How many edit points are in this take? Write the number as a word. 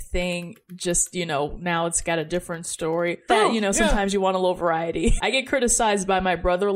two